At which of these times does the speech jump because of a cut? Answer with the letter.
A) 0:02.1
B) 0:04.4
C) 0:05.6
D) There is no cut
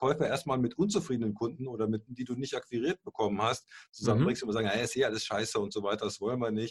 A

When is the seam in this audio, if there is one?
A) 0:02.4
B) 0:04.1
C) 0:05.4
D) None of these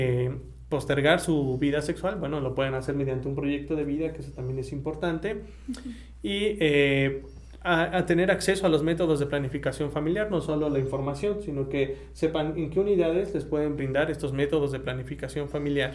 D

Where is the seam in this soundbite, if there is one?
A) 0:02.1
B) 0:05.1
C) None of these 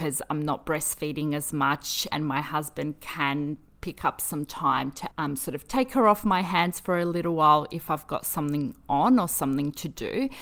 A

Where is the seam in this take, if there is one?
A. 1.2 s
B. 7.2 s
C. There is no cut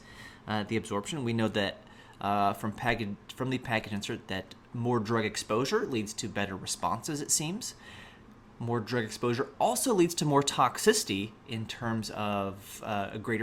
C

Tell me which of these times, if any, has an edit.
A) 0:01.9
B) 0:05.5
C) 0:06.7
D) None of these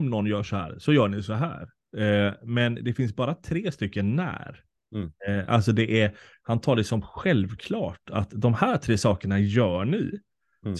A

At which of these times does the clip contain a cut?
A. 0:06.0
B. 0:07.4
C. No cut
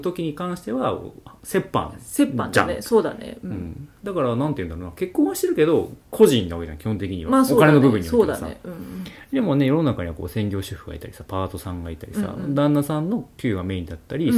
A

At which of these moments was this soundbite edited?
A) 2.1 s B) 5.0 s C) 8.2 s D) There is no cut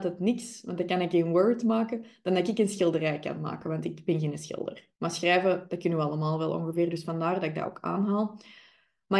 B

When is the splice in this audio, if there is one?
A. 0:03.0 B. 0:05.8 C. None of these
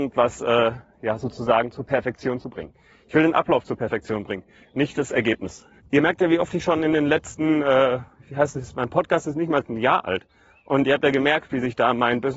B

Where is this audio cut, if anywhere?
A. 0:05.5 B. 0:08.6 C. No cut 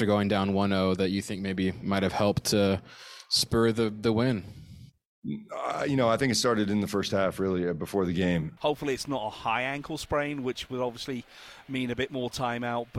B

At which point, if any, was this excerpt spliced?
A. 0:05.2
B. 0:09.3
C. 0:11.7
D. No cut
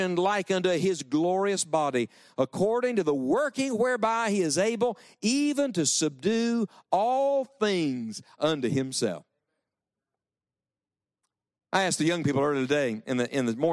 D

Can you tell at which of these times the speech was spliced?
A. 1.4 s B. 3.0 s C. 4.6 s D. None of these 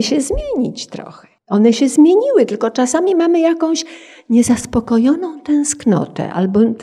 A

